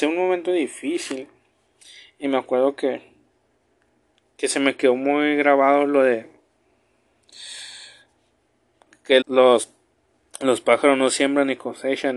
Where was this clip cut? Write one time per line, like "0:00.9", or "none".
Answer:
0:09.2